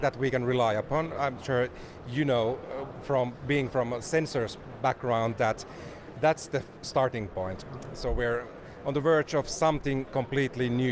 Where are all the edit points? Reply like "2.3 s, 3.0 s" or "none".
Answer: 7.9 s